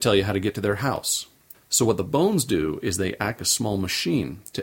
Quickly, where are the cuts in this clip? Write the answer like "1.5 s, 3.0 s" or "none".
1.5 s, 3.4 s